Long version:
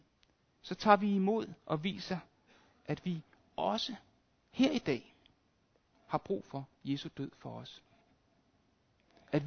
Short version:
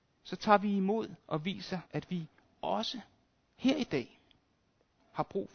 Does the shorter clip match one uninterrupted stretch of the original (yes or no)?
no